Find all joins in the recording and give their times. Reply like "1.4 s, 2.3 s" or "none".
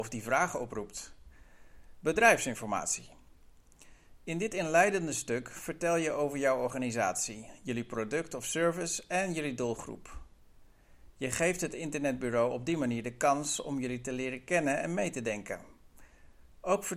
2.0 s

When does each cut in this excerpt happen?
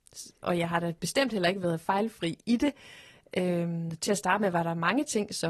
none

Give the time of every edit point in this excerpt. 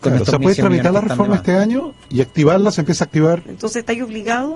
2.1 s, 3.5 s

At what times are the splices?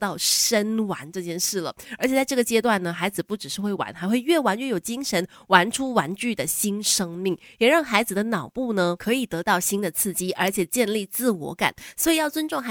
none

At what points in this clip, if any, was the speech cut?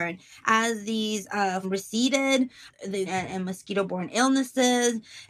1.6 s, 3.1 s

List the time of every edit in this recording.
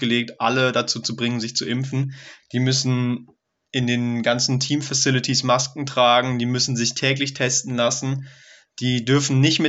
2.4 s

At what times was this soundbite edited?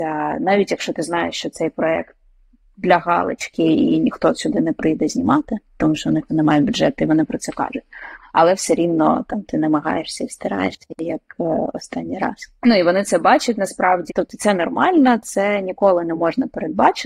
6.3 s, 12.6 s, 14.1 s

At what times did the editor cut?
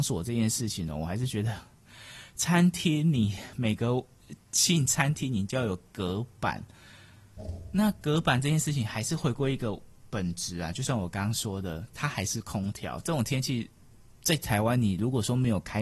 none

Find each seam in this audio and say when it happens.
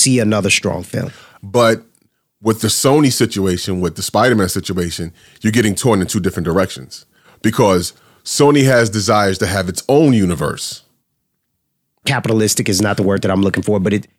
1.4 s, 12.0 s

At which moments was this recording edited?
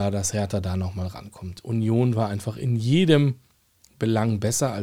none

